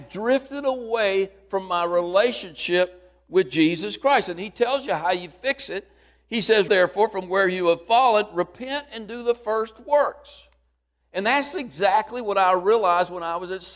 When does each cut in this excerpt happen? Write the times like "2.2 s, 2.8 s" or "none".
6.7 s, 11.0 s